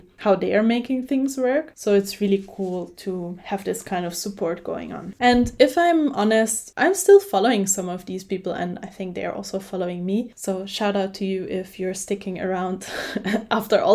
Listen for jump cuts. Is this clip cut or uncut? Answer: uncut